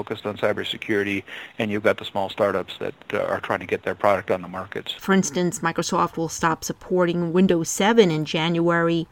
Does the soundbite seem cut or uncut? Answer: cut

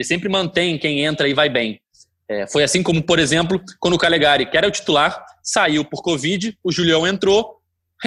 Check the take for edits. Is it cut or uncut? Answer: uncut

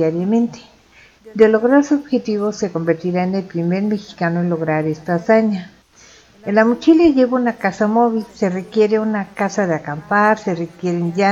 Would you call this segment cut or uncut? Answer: uncut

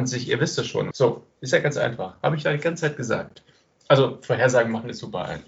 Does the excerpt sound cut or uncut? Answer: cut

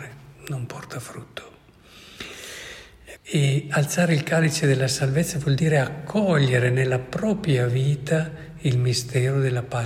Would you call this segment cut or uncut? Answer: cut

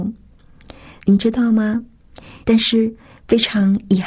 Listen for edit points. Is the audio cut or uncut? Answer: cut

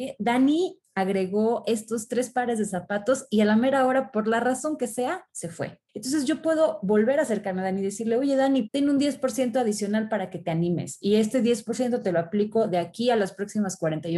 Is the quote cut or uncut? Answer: cut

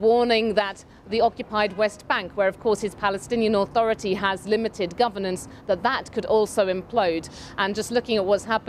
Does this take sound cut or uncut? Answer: uncut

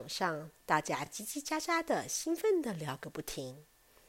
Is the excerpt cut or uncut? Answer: uncut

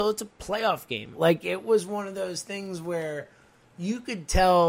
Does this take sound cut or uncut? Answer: cut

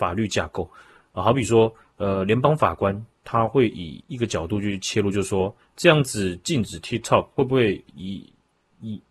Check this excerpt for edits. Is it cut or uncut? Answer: uncut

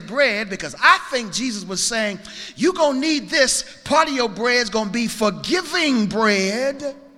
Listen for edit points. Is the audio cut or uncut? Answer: uncut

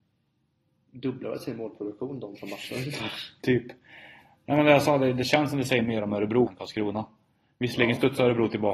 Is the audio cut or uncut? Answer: cut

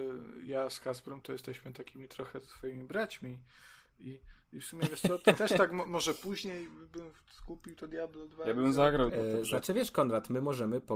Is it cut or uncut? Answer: cut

